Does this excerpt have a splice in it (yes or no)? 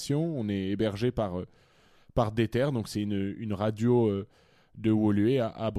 no